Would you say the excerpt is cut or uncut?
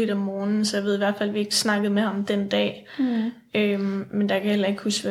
uncut